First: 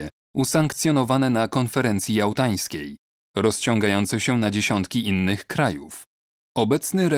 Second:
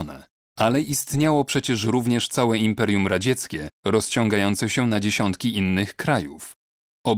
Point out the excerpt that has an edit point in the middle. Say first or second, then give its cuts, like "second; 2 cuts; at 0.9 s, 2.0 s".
second; 1 cut; at 3.7 s